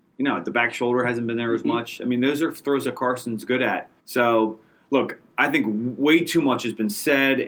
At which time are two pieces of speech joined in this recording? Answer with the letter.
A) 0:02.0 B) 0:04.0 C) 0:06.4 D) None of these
B